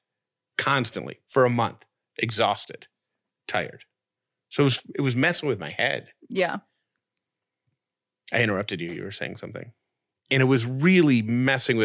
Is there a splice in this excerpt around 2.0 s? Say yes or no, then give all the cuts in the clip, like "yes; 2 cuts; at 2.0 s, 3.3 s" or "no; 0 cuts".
no; 1 cut; at 10.1 s